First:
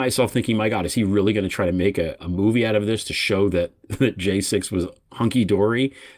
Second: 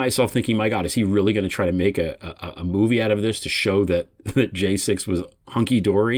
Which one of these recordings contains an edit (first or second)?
first